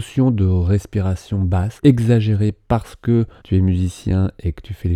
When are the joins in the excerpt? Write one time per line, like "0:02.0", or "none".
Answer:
0:01.8
0:03.4